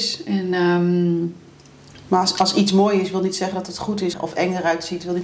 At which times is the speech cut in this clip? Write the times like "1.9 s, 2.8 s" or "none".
4.1 s

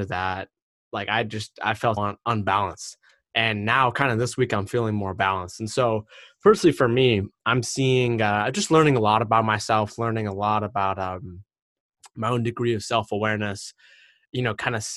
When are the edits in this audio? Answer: 2.0 s

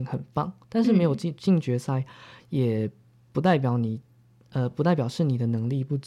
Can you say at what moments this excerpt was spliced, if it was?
none

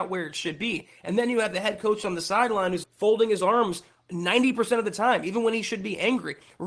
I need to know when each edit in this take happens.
2.8 s

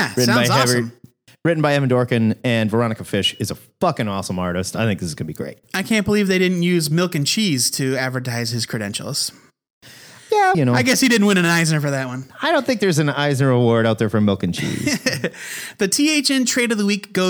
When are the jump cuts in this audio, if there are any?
10.5 s

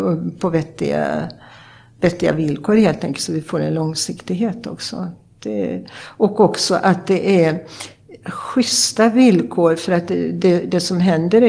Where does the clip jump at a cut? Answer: none

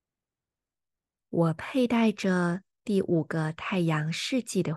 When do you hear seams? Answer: none

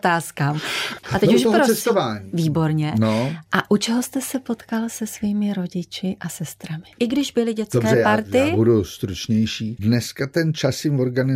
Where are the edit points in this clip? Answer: 1.0 s, 6.9 s, 9.8 s

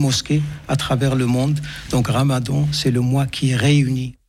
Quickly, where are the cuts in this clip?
none

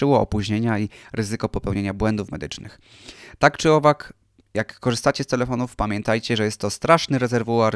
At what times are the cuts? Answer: none

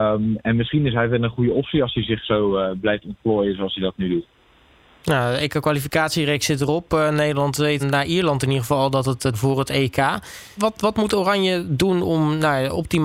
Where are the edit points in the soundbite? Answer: 7.8 s, 9.3 s, 10.6 s

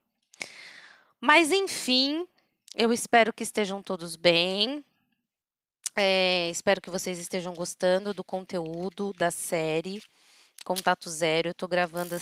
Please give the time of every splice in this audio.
none

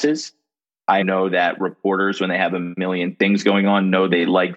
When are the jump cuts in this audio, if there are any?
1.0 s

